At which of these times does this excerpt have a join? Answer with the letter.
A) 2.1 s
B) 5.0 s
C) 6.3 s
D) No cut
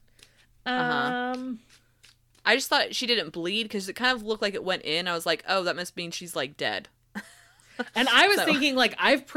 D